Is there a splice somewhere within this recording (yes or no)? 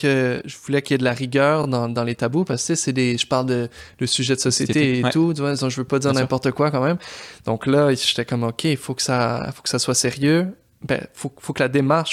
no